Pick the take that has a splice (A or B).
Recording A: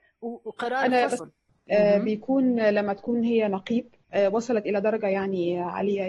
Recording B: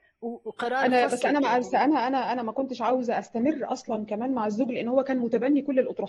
A